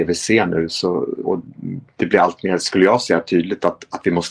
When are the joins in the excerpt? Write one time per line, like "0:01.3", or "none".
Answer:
0:01.2

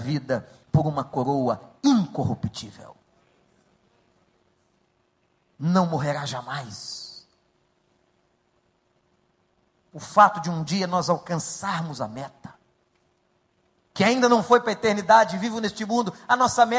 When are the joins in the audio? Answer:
0:13.8

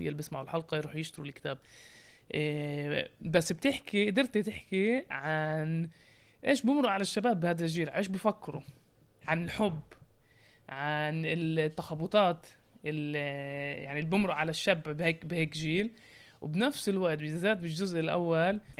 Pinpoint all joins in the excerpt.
none

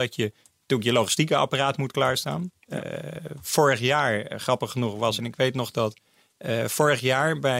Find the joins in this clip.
0:05.2

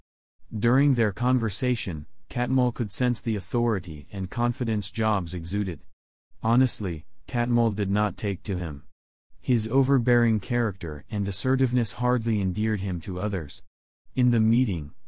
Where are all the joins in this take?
0:14.1

